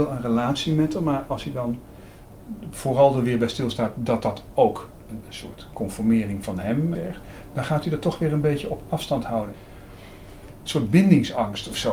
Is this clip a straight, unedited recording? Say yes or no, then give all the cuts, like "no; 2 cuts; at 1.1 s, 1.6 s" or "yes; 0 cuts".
yes; 0 cuts